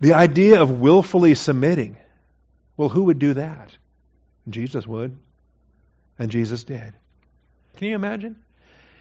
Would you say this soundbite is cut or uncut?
cut